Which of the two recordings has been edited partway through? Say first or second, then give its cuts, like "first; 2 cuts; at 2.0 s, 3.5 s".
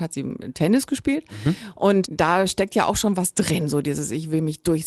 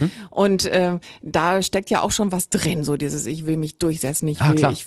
first; 1 cut; at 2.0 s